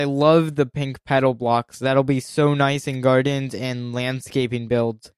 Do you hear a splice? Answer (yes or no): no